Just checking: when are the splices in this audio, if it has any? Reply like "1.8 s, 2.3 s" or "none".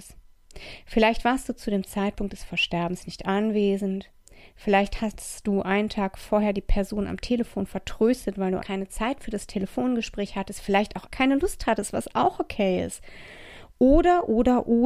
8.6 s, 11.1 s